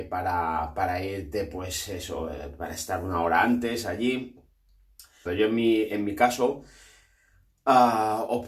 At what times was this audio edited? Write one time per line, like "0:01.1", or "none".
0:05.3